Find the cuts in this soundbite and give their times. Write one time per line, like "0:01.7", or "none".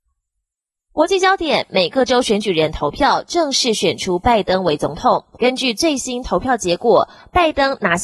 0:05.3